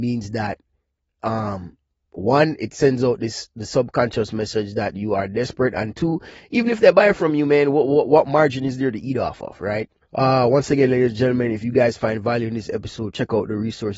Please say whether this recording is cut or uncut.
cut